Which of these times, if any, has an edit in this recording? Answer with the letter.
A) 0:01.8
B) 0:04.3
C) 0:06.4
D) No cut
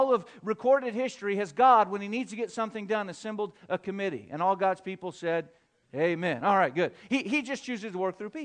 D